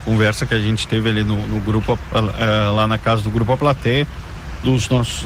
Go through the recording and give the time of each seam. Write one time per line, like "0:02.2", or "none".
none